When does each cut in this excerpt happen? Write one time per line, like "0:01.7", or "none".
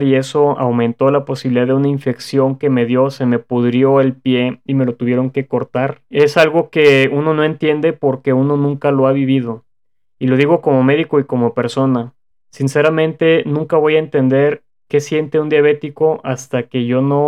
none